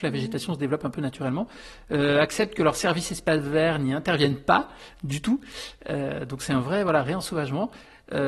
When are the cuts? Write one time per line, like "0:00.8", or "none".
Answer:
none